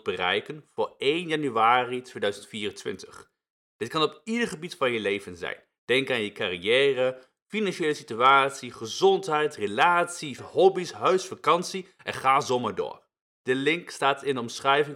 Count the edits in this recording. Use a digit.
2